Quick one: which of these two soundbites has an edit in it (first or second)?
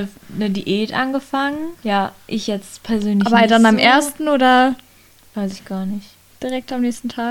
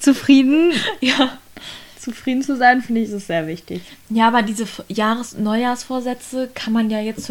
first